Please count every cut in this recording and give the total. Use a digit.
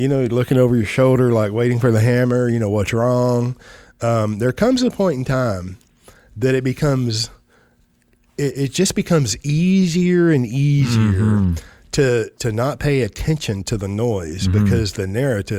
1